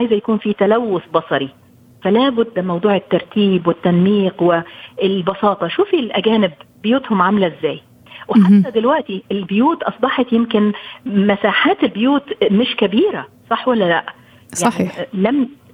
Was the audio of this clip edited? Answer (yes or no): no